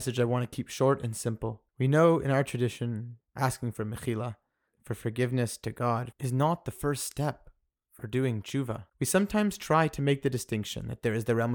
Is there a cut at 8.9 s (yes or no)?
yes